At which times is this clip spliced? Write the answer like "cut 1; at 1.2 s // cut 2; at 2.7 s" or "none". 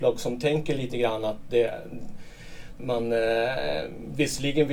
cut 1; at 2.8 s